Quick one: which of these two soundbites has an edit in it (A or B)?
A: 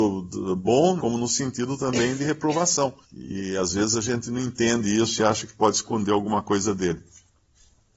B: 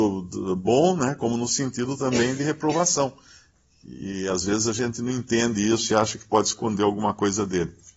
A